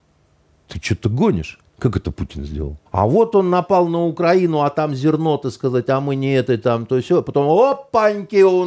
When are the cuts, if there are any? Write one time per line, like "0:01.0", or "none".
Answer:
0:01.6
0:02.9